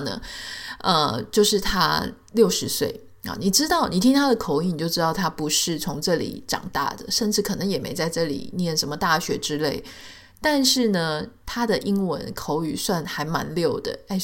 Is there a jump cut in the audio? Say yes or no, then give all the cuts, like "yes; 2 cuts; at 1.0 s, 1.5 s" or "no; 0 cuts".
no; 0 cuts